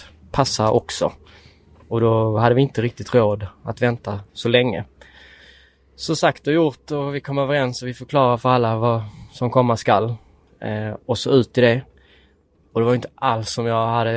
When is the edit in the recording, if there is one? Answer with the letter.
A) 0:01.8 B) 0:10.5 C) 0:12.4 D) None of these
D